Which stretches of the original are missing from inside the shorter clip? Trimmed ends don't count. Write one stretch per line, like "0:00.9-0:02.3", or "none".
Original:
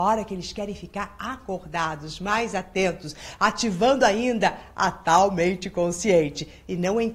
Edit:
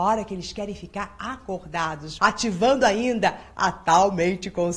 0:02.2-0:03.4